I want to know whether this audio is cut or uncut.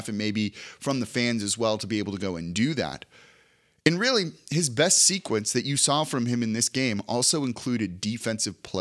uncut